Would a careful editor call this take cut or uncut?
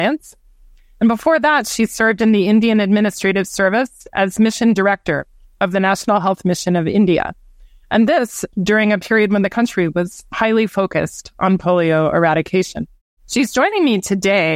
uncut